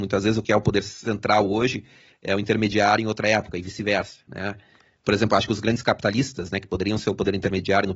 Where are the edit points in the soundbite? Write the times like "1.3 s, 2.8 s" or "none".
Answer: none